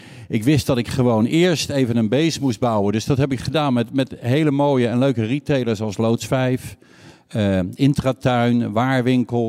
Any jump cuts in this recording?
no; 0 cuts

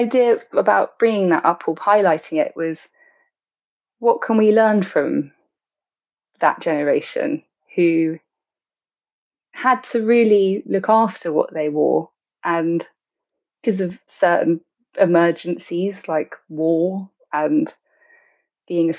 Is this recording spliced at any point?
no; 0 cuts

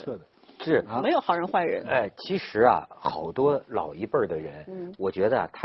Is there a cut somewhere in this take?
no; 0 cuts

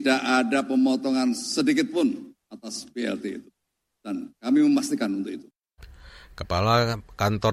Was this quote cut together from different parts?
no; 0 cuts

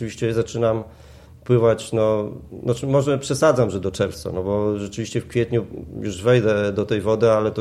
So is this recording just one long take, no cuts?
yes; 0 cuts

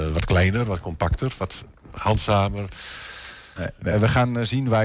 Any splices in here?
yes; 1 cut; at 3.6 s

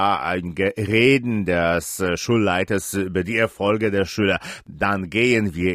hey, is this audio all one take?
yes; 0 cuts

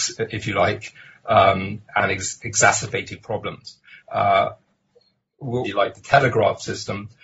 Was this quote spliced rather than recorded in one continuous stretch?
yes; 2 cuts; at 4.0 s, 5.6 s

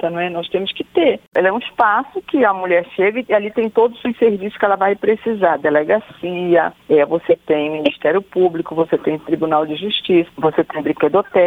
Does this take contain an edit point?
yes; 2 cuts; at 1.3 s, 10.3 s

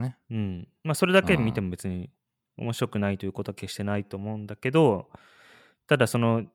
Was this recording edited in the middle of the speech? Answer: no; 0 cuts

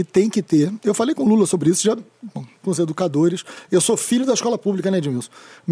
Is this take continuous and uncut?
no; 1 cut; at 2.6 s

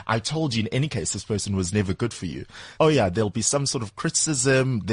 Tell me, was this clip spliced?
yes; 1 cut; at 2.8 s

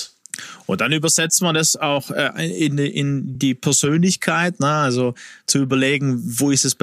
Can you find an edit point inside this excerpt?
no; 0 cuts

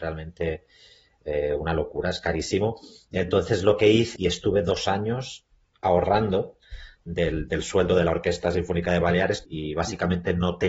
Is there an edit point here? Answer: yes; 2 cuts; at 4.1 s, 9.4 s

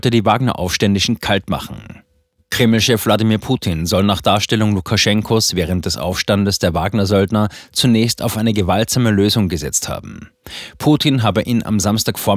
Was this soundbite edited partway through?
no; 0 cuts

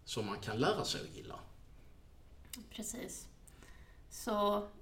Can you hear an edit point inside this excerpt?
no; 0 cuts

